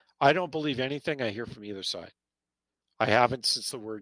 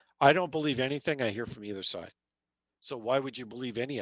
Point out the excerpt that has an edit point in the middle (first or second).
second